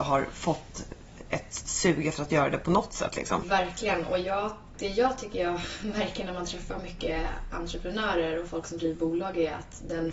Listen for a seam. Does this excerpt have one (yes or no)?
yes